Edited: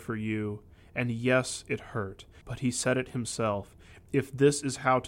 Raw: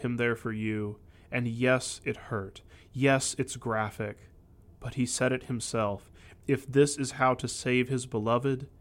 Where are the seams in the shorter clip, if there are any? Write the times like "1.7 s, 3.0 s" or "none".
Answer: 2.4 s